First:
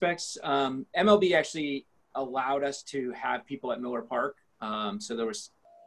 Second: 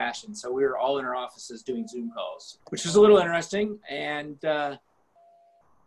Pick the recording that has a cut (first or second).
second